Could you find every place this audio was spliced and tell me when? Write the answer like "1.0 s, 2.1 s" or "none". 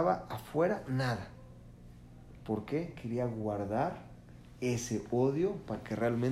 none

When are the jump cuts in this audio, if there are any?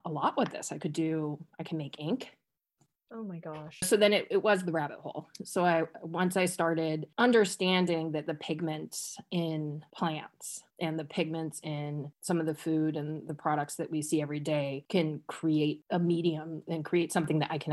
3.8 s

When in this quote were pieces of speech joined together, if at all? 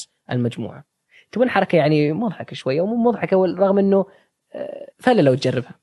4.9 s

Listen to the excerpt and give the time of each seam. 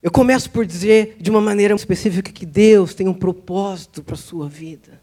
1.8 s

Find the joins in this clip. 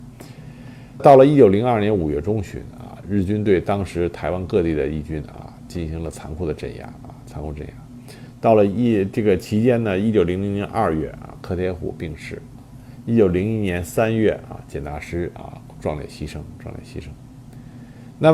1.0 s

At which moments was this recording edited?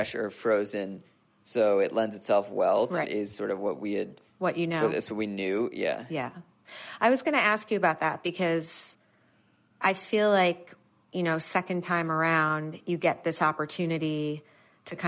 3.0 s

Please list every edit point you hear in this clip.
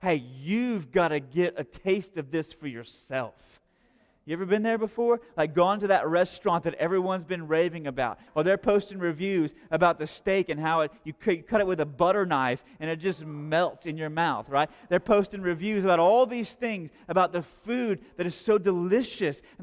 8.3 s

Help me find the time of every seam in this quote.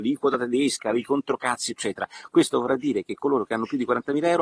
none

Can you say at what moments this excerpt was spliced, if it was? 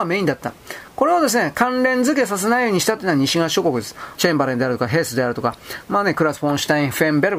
4.1 s, 5.8 s

